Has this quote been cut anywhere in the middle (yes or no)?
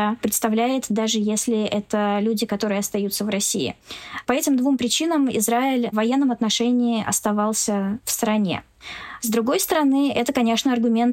yes